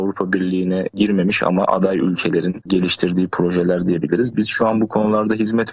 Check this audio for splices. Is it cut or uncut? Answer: uncut